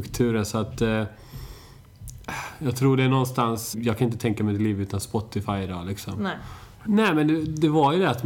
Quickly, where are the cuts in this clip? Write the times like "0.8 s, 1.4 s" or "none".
3.7 s, 6.8 s